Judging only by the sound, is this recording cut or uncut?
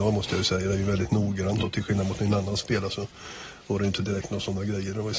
uncut